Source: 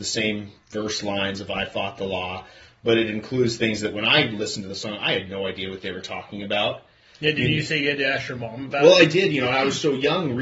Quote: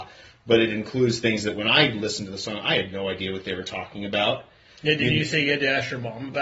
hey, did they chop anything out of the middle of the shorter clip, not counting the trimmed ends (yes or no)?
no